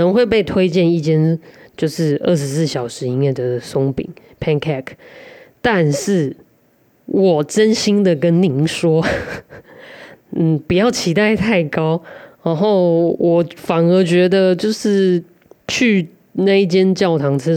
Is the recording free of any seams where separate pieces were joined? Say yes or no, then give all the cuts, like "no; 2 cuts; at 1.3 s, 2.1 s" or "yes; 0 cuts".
yes; 0 cuts